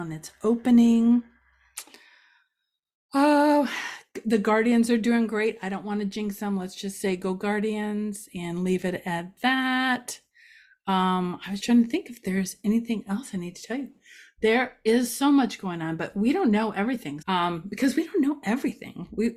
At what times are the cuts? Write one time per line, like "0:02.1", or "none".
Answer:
0:11.6
0:17.2